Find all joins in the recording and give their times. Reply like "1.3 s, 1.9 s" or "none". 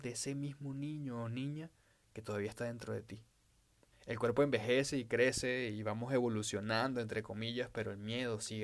3.9 s